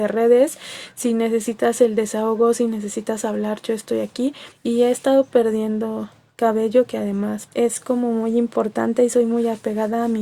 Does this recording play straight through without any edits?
no; 2 cuts; at 4.5 s, 7.5 s

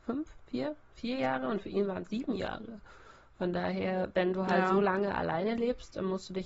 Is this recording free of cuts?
yes; 0 cuts

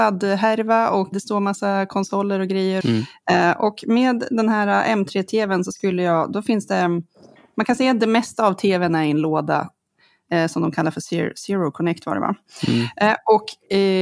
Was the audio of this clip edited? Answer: yes; 2 cuts; at 1.1 s, 2.8 s

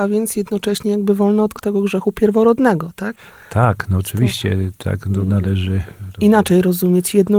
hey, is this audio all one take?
yes; 0 cuts

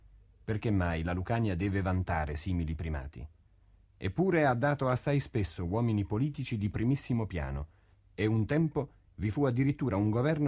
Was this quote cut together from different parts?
no; 0 cuts

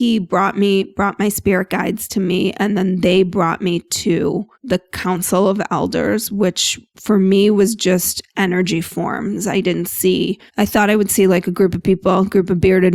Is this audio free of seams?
no; 2 cuts; at 4.5 s, 10.5 s

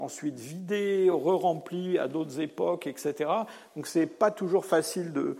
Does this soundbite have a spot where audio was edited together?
no; 0 cuts

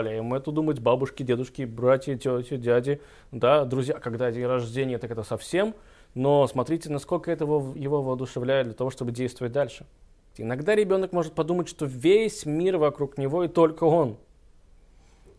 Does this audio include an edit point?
yes; 1 cut; at 10.3 s

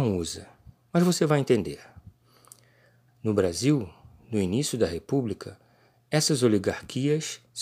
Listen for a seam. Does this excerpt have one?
yes; 1 cut; at 3.1 s

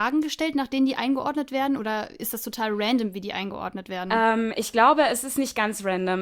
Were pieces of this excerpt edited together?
no; 0 cuts

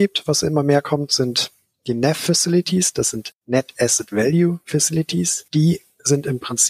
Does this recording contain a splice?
no; 0 cuts

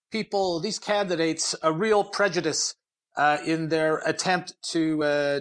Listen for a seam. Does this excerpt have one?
no; 0 cuts

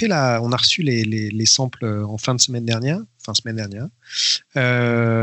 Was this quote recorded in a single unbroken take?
yes; 0 cuts

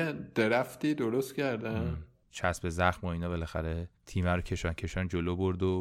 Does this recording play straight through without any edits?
no; 2 cuts; at 2.2 s, 4.0 s

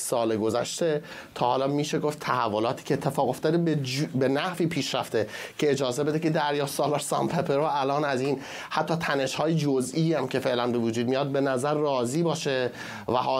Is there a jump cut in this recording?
no; 0 cuts

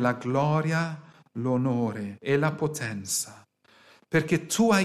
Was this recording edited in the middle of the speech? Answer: no; 0 cuts

